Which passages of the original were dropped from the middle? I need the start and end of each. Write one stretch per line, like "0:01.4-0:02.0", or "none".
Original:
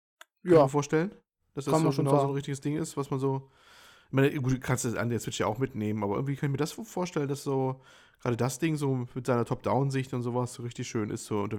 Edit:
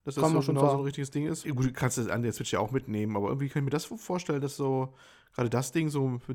0:02.9-0:04.3